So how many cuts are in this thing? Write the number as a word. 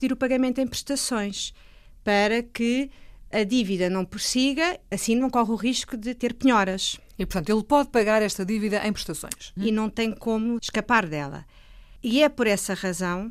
two